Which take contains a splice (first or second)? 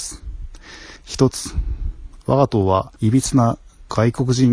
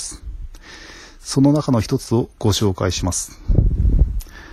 first